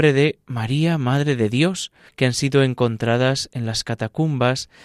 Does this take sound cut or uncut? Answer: cut